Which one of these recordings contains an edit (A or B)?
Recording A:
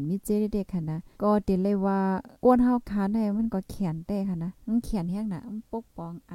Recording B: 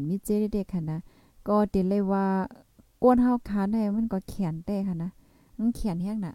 A